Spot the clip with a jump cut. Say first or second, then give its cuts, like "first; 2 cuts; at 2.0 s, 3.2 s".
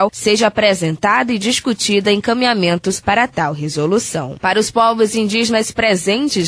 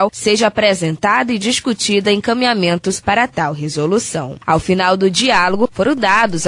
first; 1 cut; at 4.4 s